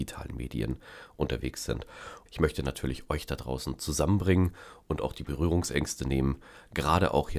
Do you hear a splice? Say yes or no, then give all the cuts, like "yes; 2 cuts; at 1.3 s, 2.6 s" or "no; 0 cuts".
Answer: yes; 1 cut; at 2.3 s